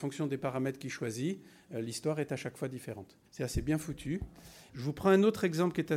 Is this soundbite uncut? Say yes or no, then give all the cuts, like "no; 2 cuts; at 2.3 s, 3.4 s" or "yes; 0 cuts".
no; 2 cuts; at 3.3 s, 4.7 s